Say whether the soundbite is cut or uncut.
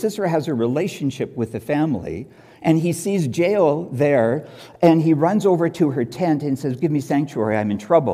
uncut